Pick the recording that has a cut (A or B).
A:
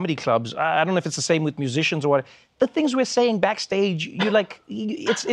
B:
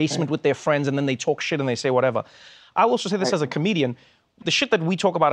B